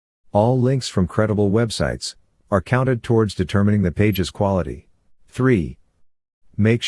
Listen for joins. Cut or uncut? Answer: cut